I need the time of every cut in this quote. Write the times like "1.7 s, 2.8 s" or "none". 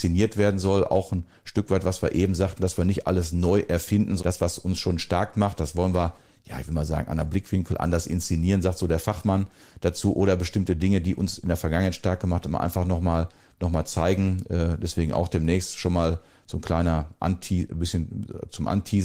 4.2 s